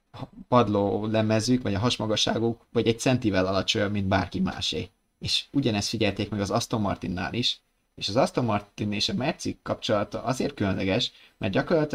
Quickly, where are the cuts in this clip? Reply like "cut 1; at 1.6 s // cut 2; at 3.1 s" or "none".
none